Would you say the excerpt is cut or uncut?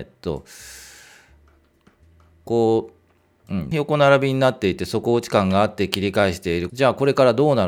cut